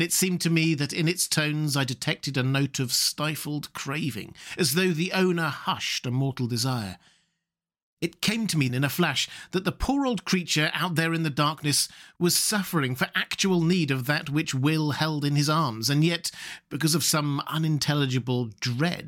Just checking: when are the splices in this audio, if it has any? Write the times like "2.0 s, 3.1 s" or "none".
8.7 s